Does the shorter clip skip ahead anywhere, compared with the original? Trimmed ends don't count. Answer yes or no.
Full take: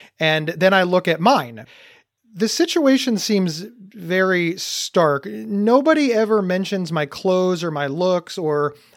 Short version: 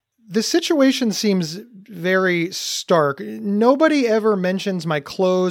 no